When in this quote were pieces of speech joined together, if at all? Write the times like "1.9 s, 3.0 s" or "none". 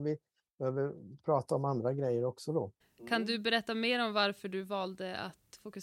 2.8 s